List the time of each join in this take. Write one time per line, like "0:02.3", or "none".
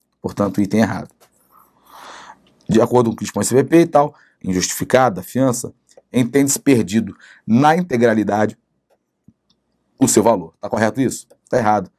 0:04.4